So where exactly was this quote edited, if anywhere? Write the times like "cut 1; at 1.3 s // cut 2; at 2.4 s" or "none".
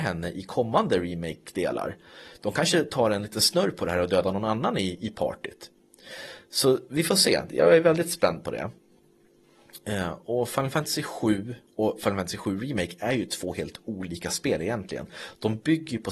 none